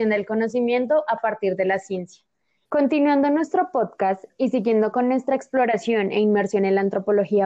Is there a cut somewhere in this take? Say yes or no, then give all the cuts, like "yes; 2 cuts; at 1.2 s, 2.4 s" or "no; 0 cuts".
yes; 1 cut; at 2.7 s